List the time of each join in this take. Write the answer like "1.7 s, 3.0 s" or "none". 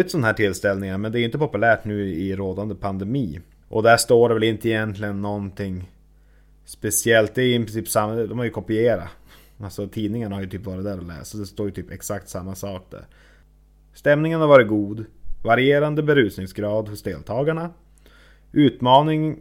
3.6 s